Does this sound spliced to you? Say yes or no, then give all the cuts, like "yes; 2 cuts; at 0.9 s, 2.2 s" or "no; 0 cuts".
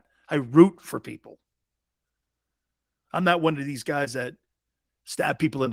no; 0 cuts